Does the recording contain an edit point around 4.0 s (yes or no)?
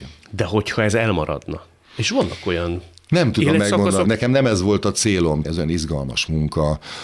yes